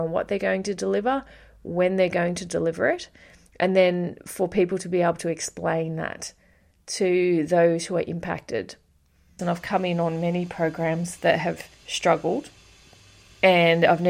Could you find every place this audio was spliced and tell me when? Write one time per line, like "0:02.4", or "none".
0:09.4
0:11.7